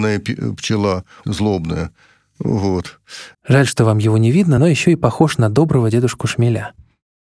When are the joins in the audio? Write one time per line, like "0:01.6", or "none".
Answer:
0:01.2
0:03.3
0:04.6